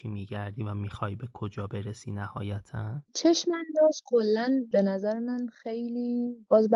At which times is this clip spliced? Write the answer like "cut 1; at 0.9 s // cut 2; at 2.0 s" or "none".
cut 1; at 3.1 s